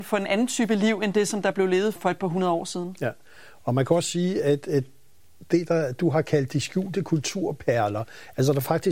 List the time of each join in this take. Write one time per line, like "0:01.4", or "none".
0:02.0